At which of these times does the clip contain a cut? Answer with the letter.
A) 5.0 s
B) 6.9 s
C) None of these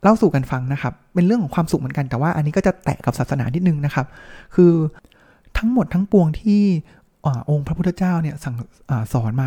C